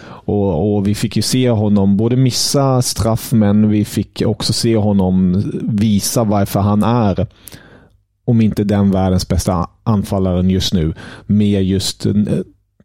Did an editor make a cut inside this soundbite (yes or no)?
no